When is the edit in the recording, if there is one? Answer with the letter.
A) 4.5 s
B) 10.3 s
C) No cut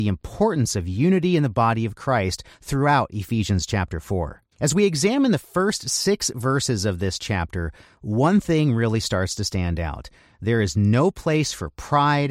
A